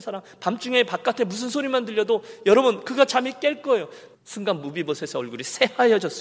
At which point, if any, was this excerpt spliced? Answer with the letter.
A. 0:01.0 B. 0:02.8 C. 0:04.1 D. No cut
C